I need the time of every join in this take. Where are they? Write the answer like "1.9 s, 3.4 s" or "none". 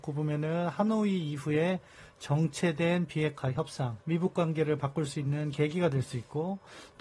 4.0 s